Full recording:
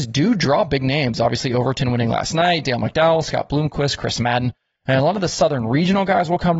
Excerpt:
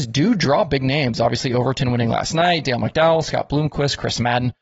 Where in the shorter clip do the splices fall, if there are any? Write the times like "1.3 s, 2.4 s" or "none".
none